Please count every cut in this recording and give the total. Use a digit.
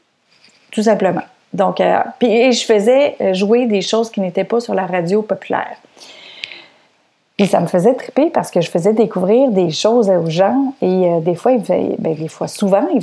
0